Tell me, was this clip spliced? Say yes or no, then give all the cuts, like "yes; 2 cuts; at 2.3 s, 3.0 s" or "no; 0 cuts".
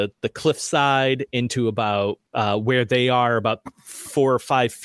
yes; 1 cut; at 2.3 s